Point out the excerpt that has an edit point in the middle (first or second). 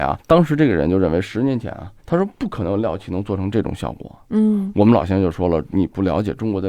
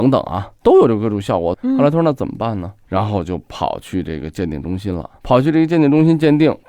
second